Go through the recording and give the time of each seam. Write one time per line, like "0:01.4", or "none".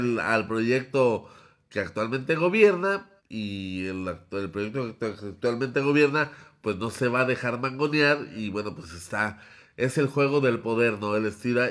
0:03.2